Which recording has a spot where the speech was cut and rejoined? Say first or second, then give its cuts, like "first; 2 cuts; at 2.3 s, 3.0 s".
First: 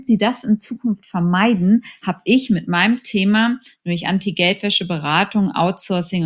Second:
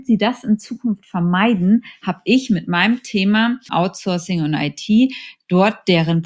second; 1 cut; at 3.7 s